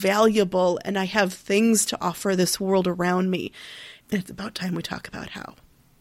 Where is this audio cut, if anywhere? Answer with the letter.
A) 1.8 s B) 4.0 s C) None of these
B